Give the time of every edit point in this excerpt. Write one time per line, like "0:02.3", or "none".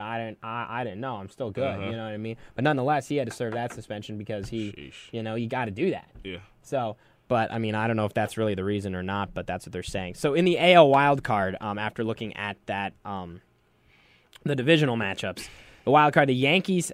none